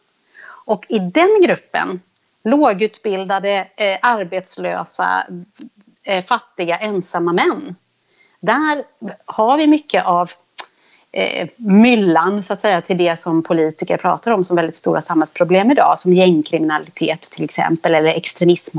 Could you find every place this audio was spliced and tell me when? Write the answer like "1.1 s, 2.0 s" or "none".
none